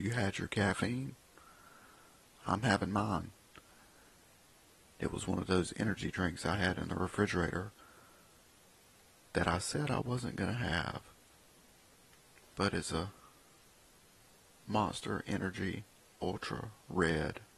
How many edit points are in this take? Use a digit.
0